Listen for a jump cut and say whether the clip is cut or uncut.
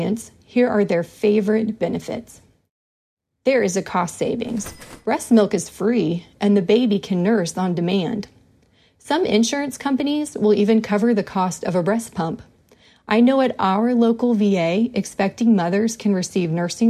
uncut